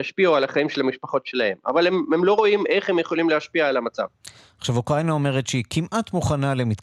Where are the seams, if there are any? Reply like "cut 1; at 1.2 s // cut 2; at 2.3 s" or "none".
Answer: none